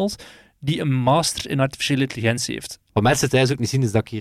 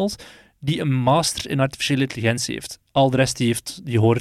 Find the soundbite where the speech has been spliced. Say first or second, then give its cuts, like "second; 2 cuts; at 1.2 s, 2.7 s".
first; 1 cut; at 2.9 s